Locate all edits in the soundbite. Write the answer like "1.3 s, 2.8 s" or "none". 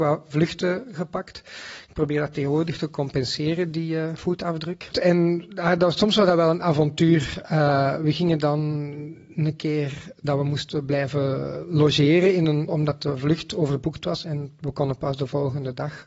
4.9 s, 12.7 s